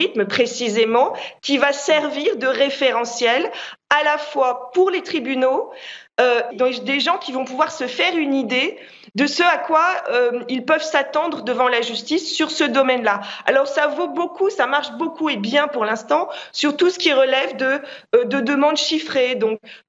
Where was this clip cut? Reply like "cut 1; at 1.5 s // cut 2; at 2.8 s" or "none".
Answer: cut 1; at 6.5 s